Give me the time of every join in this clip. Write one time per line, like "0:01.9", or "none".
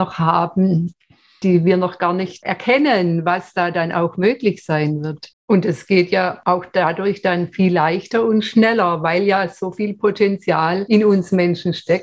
0:05.3